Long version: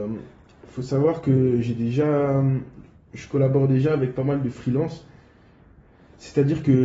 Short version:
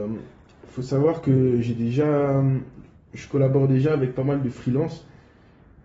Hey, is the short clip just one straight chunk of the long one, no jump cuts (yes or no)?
yes